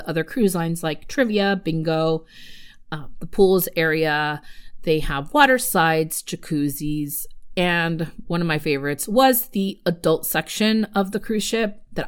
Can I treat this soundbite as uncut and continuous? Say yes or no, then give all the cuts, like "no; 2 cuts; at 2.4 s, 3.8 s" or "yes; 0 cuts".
yes; 0 cuts